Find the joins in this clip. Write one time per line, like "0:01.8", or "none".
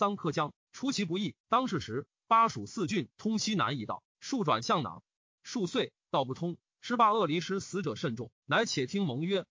0:01.4
0:08.4